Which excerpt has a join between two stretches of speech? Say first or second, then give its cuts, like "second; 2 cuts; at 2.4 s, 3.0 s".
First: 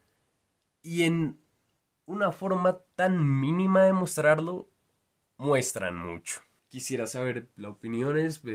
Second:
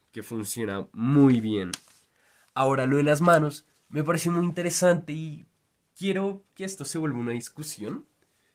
first; 1 cut; at 6.6 s